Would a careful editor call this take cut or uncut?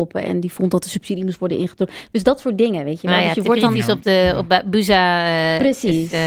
uncut